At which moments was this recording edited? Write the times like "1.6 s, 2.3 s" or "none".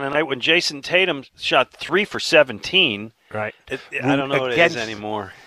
3.6 s